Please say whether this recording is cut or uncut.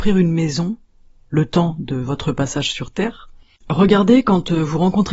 cut